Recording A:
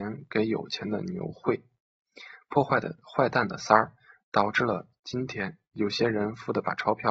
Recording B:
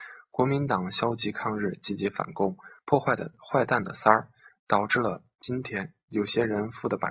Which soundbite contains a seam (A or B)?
B